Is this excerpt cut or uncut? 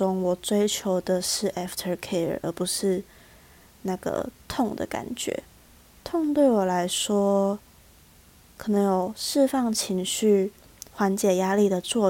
uncut